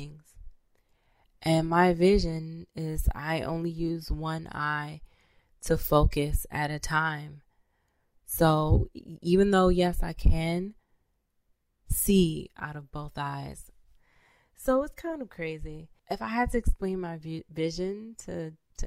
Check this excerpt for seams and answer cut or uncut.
cut